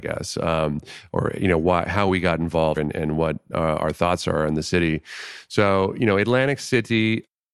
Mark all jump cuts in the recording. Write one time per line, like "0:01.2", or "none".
0:02.8